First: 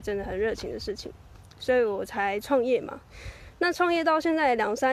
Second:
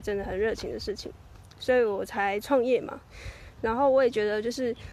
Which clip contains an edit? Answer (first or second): second